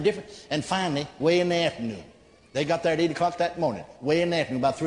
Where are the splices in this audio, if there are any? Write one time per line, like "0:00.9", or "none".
none